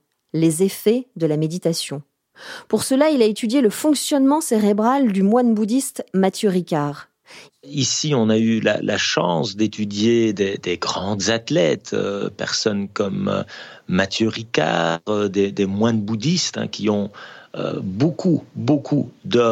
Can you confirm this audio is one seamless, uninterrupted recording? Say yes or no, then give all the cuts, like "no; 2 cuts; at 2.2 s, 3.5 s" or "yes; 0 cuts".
no; 1 cut; at 7.5 s